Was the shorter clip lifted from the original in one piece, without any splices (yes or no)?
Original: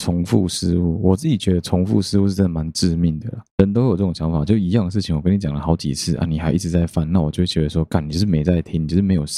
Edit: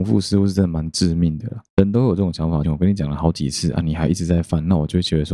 no